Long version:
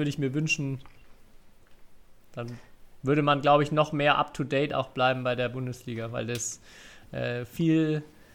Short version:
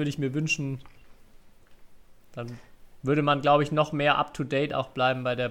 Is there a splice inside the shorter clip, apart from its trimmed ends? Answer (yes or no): no